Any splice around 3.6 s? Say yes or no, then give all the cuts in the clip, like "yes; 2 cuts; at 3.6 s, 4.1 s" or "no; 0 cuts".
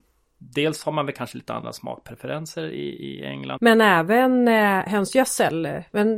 yes; 1 cut; at 3.6 s